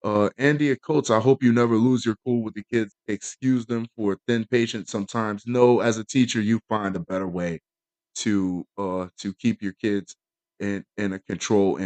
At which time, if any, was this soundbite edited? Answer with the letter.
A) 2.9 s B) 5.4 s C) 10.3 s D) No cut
A